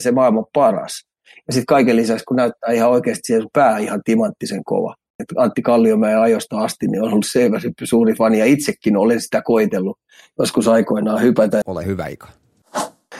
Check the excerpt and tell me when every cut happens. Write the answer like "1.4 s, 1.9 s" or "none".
5.2 s, 11.6 s